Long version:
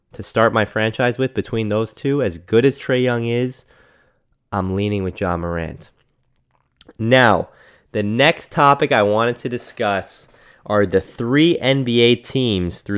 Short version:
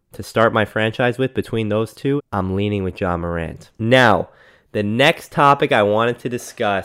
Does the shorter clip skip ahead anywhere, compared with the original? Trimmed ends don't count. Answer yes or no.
yes